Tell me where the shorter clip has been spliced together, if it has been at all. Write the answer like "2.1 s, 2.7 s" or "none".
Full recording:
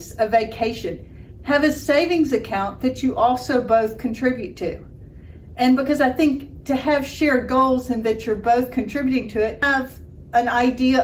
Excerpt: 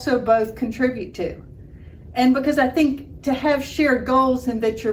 none